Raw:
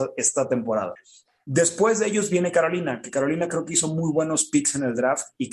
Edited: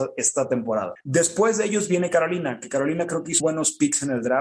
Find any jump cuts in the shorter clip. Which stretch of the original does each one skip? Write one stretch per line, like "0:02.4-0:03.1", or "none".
0:01.0-0:01.4
0:03.8-0:04.1